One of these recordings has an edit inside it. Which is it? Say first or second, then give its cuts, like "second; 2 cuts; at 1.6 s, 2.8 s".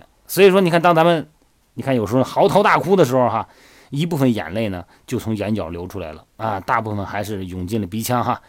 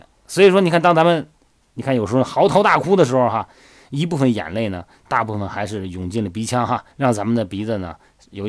second; 2 cuts; at 5.1 s, 6.9 s